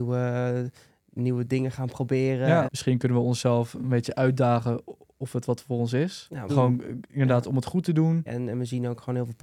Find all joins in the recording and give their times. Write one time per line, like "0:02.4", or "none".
0:02.6
0:06.5
0:08.3